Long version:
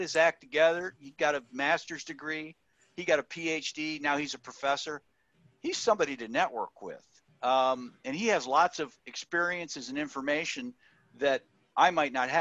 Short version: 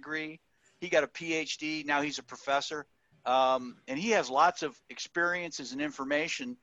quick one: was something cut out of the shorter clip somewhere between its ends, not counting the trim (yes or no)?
yes